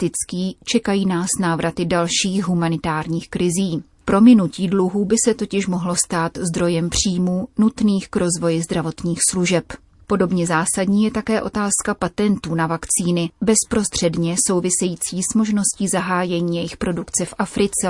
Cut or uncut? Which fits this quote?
cut